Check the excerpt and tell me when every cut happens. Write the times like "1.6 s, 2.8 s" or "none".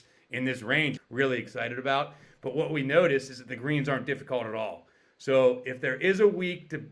1.0 s